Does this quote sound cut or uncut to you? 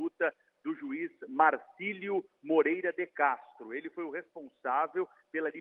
uncut